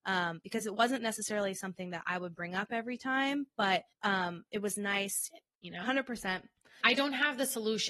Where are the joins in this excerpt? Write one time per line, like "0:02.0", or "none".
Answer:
0:03.9
0:05.3
0:06.8